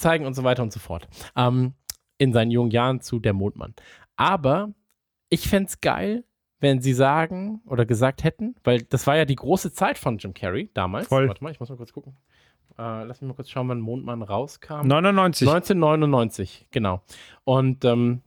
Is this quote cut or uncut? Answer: uncut